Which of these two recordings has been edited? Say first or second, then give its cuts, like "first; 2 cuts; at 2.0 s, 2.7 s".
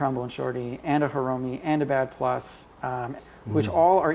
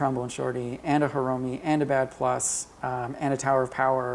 first; 1 cut; at 3.2 s